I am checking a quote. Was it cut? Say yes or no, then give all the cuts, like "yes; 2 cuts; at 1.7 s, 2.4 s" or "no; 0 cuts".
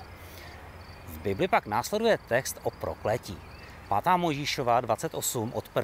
yes; 1 cut; at 3.8 s